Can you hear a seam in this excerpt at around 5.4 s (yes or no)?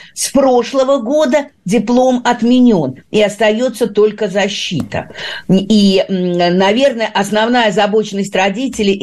yes